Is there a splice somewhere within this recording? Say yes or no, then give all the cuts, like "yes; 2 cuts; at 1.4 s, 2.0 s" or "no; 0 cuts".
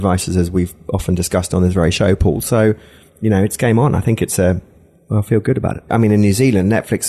yes; 1 cut; at 5.9 s